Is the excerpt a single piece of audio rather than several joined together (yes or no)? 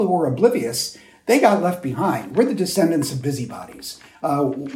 yes